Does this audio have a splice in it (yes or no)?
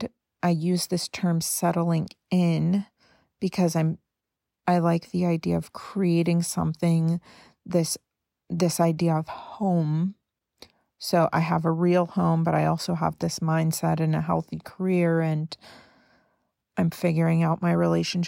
no